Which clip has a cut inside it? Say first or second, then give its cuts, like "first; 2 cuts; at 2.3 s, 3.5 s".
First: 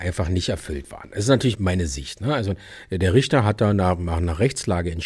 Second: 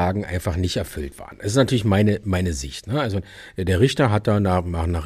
first; 1 cut; at 1.5 s